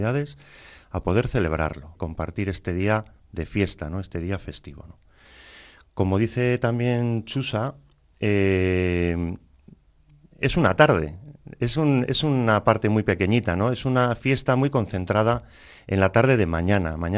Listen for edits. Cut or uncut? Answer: cut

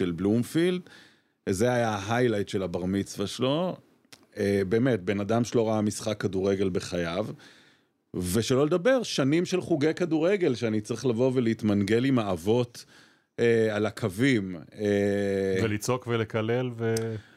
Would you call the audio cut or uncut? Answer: uncut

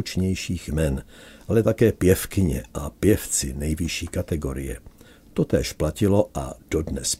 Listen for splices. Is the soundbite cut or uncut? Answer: uncut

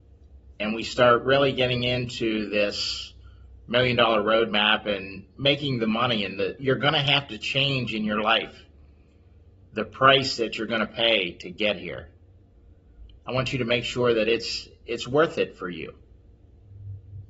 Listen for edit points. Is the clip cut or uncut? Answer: cut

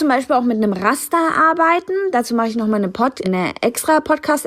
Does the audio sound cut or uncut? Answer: cut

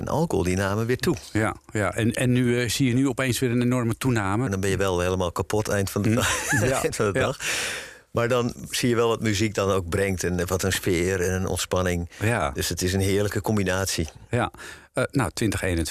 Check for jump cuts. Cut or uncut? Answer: cut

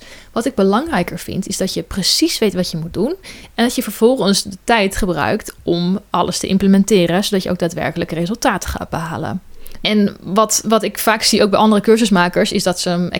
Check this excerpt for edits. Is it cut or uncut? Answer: uncut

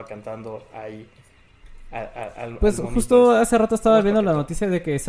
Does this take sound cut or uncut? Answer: uncut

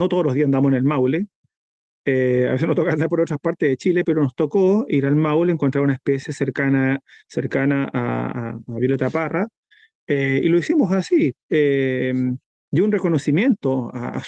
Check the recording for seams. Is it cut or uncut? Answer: uncut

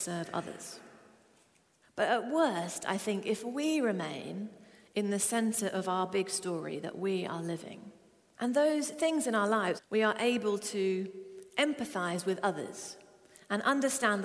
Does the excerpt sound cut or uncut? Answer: cut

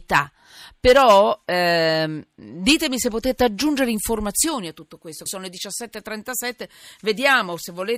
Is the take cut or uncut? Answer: cut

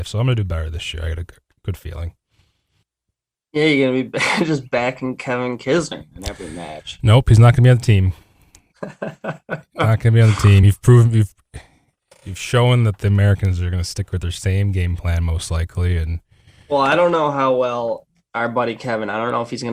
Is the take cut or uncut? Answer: uncut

